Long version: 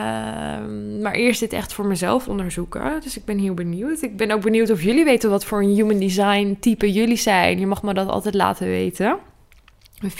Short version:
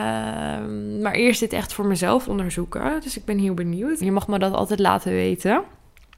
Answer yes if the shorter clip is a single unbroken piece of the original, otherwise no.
no